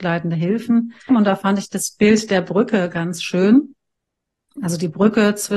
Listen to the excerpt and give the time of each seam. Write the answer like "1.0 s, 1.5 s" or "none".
1.1 s